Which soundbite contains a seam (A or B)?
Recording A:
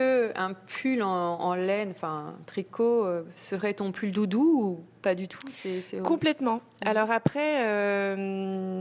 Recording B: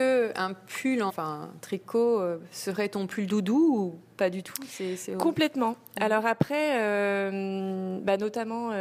B